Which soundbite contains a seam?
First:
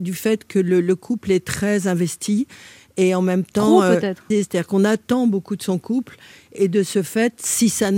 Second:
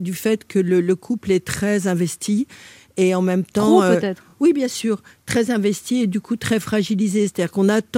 first; 2 cuts; at 4.3 s, 6.6 s

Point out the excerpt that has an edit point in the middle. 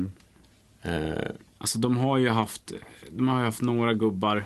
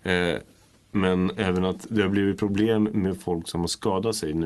first; 1 cut; at 1.5 s

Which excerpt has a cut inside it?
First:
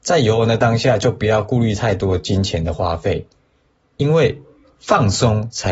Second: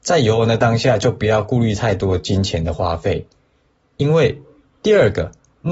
second; 1 cut; at 4.6 s

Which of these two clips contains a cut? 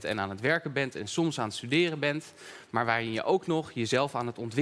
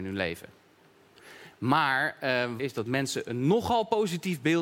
second; 2 cuts; at 1.5 s, 2.6 s

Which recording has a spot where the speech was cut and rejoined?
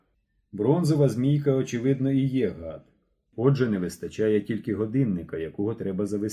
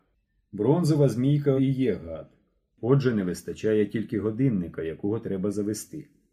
second; 1 cut; at 1.6 s

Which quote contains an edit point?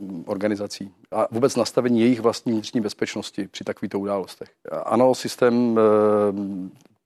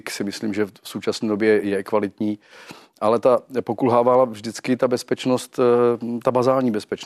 first; 1 cut; at 4.7 s

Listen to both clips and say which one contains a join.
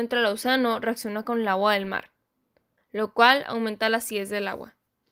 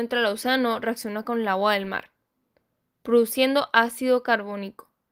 first; 1 cut; at 2.8 s

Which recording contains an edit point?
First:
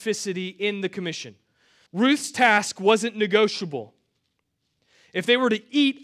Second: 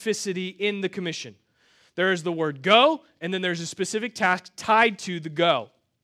first; 1 cut; at 1.9 s

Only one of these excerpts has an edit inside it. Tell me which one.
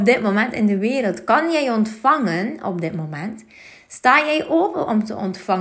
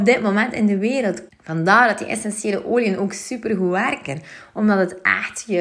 second; 1 cut; at 1.3 s

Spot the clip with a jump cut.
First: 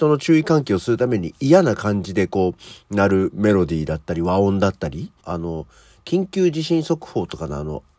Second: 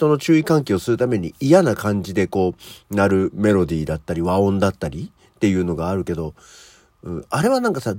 first; 1 cut; at 5.2 s

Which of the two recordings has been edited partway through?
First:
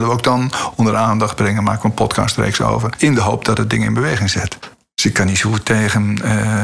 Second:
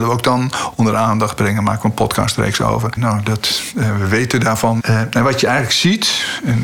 second; 2 cuts; at 3.0 s, 4.8 s

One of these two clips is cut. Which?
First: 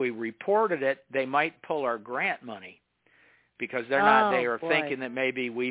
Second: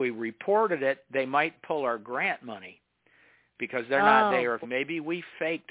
second; 1 cut; at 4.6 s

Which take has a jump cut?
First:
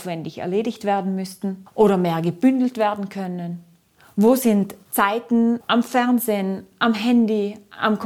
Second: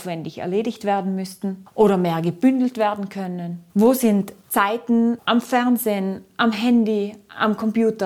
second; 1 cut; at 3.7 s

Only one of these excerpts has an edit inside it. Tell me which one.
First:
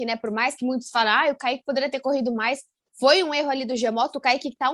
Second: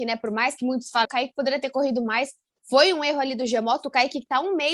second; 1 cut; at 1.0 s

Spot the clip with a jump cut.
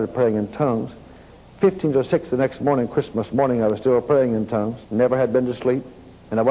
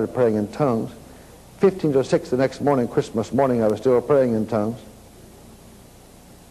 first; 1 cut; at 4.8 s

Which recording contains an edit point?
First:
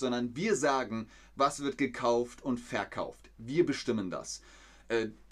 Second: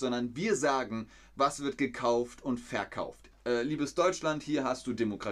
second; 1 cut; at 3.3 s

